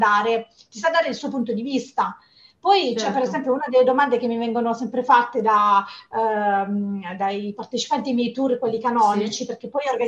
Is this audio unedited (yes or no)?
yes